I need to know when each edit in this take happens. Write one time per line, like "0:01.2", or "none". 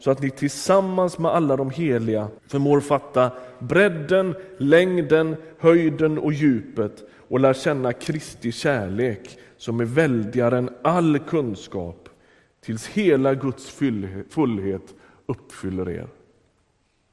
0:02.4